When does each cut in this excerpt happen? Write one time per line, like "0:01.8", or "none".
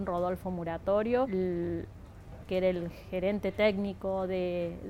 0:01.3
0:02.4